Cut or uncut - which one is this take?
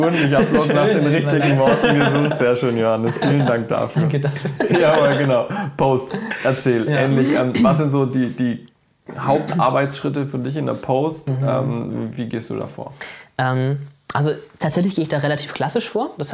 uncut